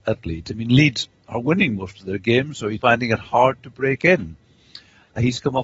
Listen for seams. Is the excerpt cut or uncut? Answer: cut